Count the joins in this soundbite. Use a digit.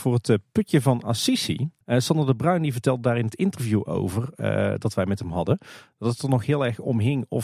1